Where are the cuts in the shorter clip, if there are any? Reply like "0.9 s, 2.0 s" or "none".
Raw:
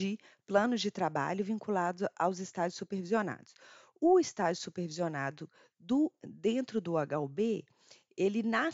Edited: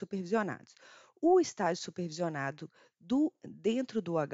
none